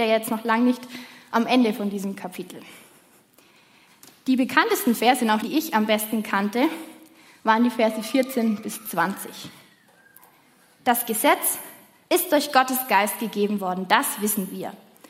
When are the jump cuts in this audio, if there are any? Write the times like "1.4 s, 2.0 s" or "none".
5.4 s